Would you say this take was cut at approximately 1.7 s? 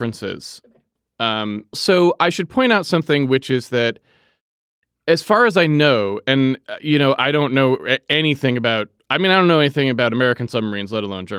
yes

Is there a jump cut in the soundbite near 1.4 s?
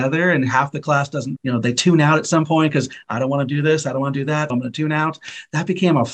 yes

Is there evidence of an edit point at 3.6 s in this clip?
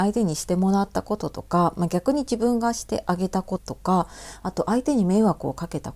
yes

